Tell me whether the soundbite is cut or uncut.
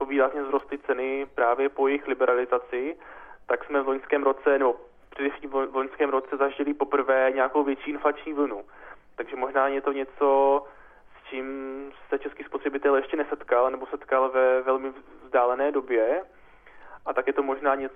uncut